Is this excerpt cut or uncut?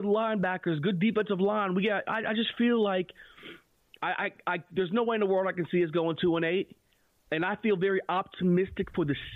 uncut